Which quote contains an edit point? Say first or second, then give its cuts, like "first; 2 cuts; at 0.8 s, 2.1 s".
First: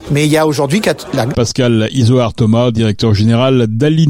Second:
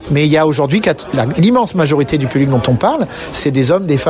first; 1 cut; at 1.3 s